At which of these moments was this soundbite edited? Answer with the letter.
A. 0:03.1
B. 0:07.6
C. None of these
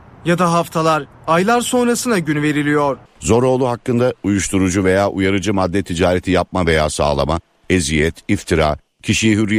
A